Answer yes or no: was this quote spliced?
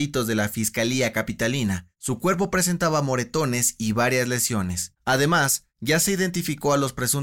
no